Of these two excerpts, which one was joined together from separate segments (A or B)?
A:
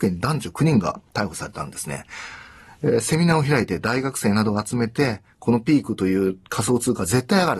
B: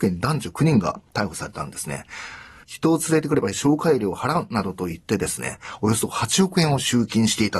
B